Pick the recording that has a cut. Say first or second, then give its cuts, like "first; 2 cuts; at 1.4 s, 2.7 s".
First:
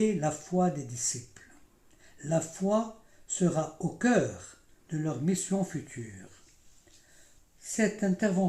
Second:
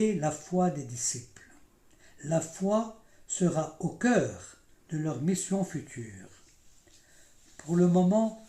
first; 1 cut; at 7.4 s